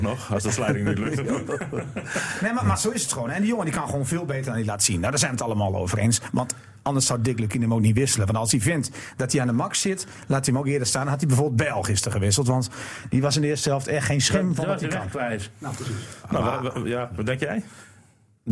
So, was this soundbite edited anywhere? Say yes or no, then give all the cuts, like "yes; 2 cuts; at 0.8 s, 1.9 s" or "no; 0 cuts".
no; 0 cuts